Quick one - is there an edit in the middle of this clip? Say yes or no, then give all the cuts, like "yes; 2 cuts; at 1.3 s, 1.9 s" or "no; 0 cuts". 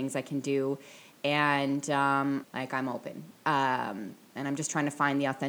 yes; 1 cut; at 2.4 s